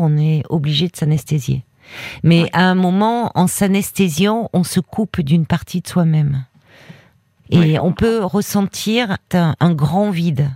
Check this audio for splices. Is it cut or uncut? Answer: cut